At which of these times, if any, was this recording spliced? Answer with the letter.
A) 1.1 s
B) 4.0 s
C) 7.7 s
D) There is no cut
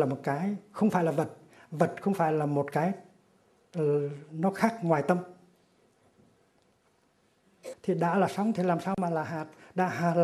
C